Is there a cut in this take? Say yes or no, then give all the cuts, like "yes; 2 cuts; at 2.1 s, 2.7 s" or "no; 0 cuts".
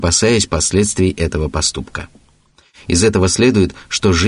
no; 0 cuts